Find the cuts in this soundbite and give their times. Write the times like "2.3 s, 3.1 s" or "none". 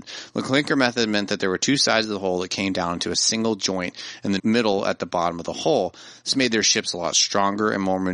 4.4 s